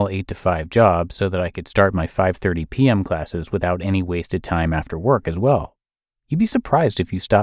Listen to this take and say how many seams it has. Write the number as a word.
zero